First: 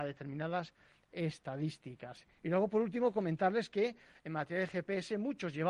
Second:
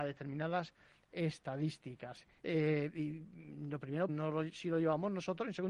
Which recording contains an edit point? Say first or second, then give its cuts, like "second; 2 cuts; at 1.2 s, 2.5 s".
second; 2 cuts; at 2.4 s, 4.1 s